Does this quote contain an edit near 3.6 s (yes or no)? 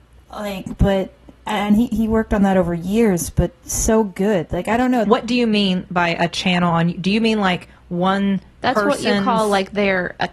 no